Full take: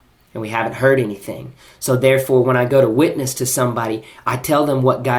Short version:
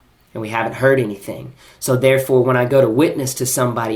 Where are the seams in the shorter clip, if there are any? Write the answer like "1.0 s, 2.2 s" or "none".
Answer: none